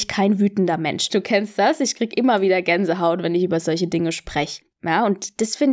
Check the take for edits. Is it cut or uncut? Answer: cut